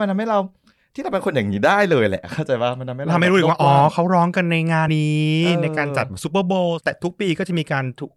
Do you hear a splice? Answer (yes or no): yes